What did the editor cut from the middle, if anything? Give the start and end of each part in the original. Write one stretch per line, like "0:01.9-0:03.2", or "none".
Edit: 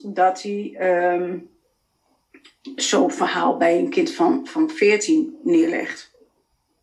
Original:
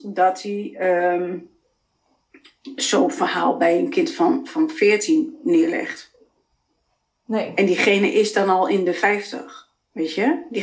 none